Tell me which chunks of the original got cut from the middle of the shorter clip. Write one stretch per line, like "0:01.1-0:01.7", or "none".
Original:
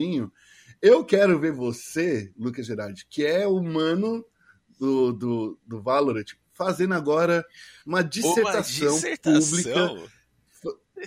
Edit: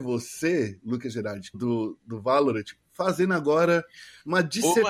0:03.1-0:05.1